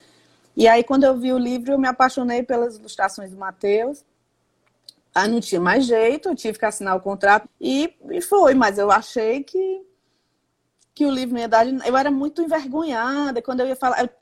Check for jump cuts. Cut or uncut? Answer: cut